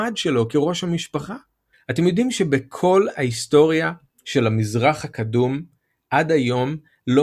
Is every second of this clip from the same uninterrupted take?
no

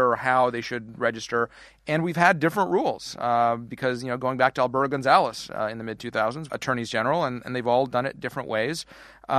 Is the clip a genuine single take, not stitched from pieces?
no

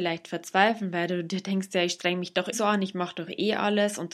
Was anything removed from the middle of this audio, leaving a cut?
yes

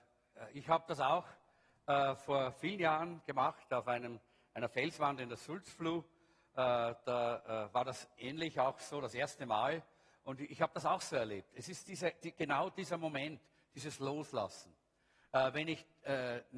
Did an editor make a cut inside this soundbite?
no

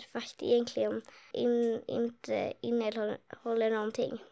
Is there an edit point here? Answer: yes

